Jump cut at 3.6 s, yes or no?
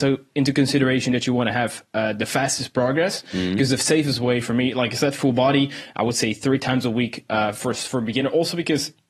no